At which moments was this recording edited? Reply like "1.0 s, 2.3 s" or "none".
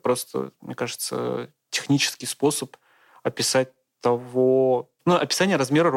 5.0 s